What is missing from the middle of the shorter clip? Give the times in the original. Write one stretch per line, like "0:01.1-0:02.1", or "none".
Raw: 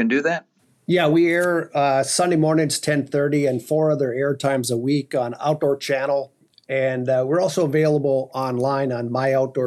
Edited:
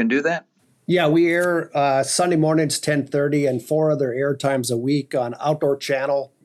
none